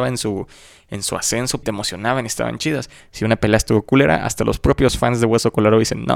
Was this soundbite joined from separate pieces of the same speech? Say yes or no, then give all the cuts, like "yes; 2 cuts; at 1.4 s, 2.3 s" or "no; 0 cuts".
yes; 2 cuts; at 1.6 s, 3.0 s